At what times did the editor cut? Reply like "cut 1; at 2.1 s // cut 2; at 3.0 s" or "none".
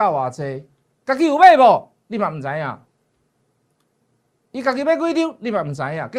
none